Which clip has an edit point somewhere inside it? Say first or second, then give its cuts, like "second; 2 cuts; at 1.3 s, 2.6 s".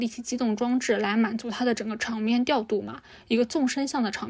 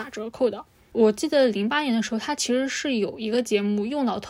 second; 1 cut; at 0.9 s